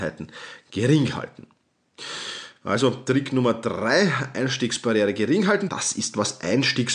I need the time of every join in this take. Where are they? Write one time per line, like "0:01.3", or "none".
0:05.7